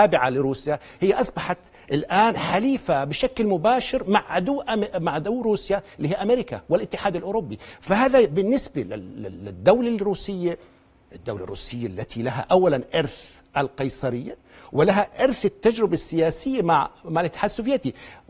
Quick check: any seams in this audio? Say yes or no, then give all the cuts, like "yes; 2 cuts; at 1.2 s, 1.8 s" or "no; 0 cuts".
no; 0 cuts